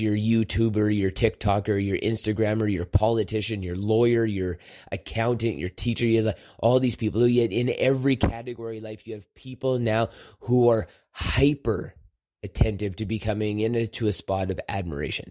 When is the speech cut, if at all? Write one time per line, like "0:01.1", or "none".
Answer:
none